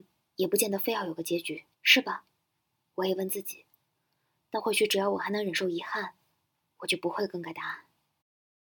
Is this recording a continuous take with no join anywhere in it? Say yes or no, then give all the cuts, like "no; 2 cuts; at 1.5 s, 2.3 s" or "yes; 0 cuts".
no; 1 cut; at 1.7 s